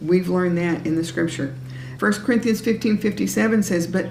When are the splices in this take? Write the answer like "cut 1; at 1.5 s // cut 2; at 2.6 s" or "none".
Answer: cut 1; at 2.0 s